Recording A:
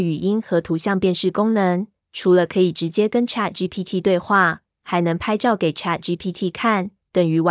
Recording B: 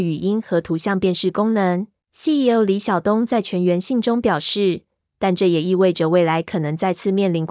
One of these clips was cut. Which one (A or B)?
B